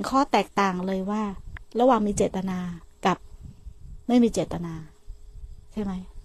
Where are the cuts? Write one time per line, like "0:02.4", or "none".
none